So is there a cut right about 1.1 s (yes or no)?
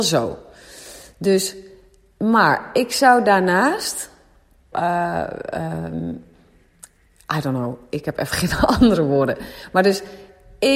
no